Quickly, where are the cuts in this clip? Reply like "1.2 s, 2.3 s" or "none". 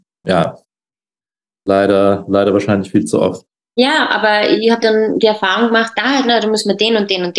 4.8 s, 6.0 s